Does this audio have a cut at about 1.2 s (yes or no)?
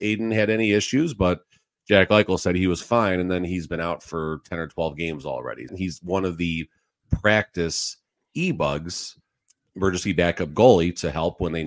no